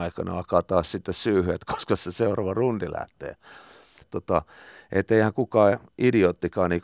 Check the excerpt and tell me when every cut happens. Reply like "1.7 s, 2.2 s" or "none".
4.0 s